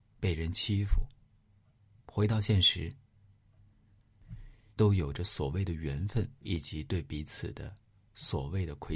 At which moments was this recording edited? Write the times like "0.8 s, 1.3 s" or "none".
2.0 s, 4.7 s, 6.4 s